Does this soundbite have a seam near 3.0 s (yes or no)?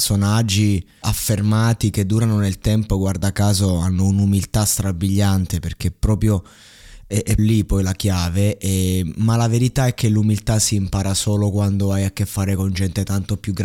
no